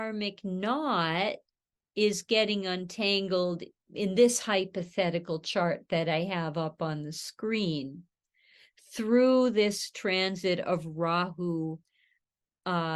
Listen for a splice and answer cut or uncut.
uncut